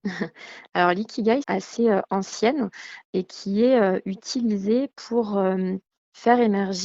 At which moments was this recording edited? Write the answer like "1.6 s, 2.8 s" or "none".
1.4 s

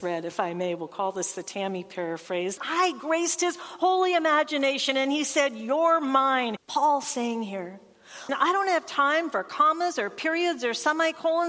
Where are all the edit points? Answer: 2.6 s, 6.6 s, 8.3 s

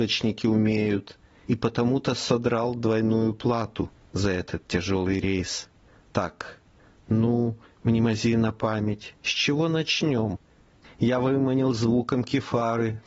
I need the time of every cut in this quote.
10.8 s

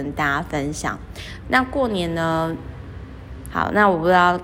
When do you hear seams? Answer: 1.4 s, 3.5 s

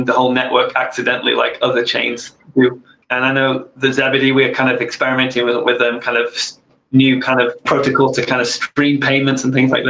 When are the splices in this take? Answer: 3.0 s

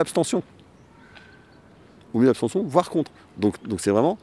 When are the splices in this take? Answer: none

